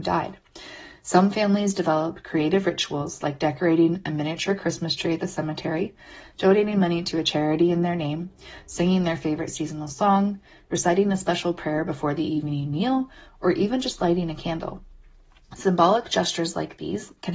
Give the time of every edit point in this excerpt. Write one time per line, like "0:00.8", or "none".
none